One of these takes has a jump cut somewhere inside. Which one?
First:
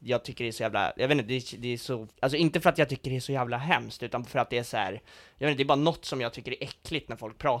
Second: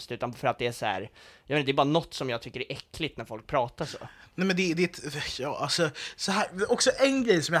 first; 1 cut; at 2.1 s

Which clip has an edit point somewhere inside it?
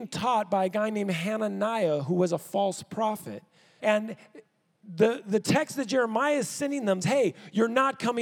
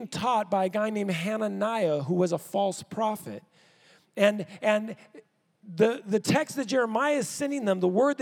first; 2 cuts; at 3.8 s, 7.0 s

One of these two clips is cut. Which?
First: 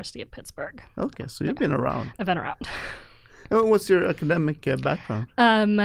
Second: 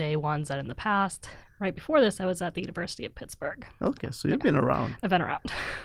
second; 1 cut; at 1.4 s

